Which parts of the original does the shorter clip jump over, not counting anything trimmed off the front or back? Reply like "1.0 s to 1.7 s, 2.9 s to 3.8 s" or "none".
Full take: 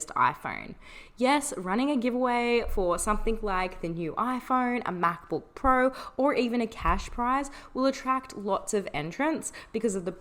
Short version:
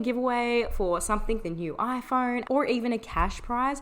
3.4 s to 3.8 s, 4.8 s to 6.1 s